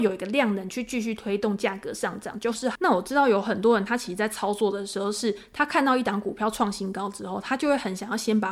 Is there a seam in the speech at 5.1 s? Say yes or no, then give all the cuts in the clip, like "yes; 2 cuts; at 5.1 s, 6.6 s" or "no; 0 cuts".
no; 1 cut; at 2.8 s